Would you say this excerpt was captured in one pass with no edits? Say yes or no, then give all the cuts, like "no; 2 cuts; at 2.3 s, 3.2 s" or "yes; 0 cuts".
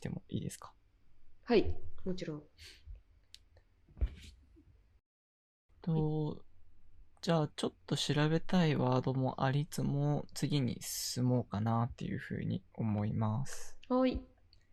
no; 1 cut; at 9.7 s